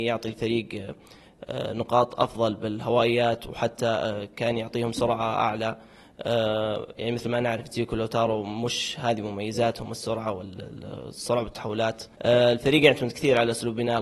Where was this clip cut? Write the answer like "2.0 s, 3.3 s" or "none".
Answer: 12.1 s